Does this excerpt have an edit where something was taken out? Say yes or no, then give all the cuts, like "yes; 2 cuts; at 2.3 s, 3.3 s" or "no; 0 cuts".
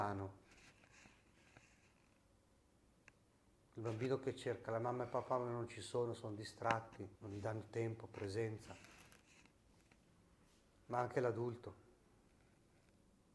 yes; 1 cut; at 7.2 s